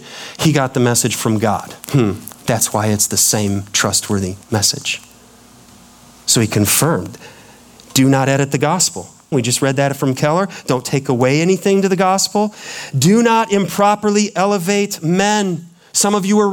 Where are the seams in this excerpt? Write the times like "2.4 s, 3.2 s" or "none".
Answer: 1.8 s, 9.3 s